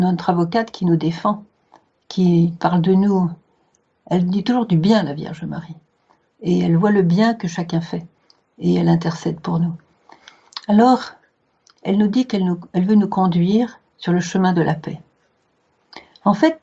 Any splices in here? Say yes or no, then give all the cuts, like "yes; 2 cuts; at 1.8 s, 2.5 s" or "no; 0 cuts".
no; 0 cuts